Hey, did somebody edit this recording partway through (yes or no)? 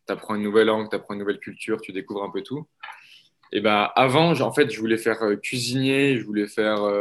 no